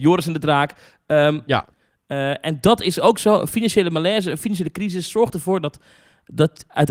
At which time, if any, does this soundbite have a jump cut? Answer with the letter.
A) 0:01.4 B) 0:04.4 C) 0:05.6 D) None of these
A